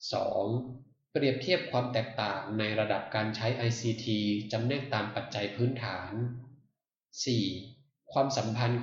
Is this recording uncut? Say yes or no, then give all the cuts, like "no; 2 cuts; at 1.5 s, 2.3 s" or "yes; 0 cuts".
no; 1 cut; at 1.1 s